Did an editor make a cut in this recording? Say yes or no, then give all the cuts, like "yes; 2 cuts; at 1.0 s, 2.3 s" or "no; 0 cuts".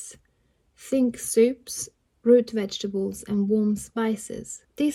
yes; 1 cut; at 2.1 s